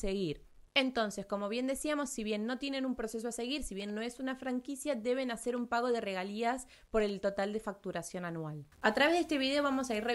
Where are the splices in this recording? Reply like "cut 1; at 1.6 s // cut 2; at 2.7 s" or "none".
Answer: none